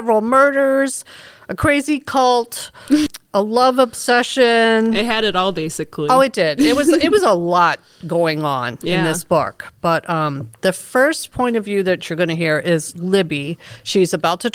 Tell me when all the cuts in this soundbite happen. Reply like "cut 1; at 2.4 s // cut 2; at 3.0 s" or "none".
cut 1; at 3.1 s